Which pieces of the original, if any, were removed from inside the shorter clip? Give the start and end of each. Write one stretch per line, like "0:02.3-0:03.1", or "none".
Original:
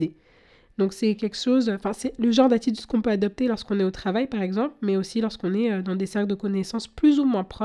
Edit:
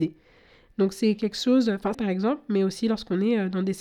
0:01.9-0:04.3